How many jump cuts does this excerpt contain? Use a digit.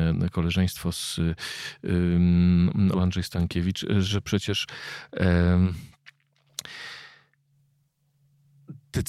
1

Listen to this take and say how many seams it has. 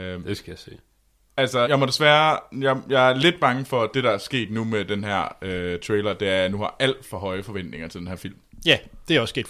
1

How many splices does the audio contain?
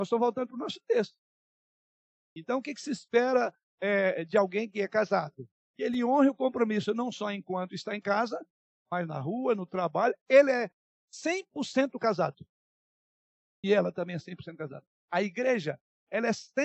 0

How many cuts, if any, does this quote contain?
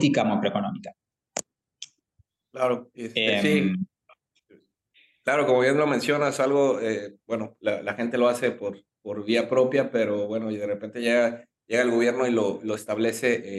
0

